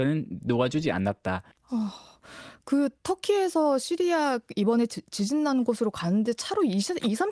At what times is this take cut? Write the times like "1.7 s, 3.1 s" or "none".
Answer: 1.5 s